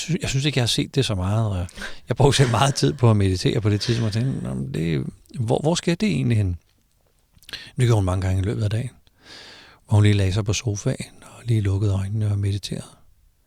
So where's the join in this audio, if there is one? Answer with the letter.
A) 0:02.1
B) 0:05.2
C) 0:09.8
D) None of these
D